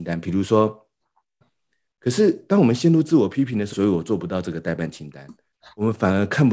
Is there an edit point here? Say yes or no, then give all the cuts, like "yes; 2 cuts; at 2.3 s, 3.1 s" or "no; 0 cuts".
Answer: yes; 2 cuts; at 1.4 s, 3.7 s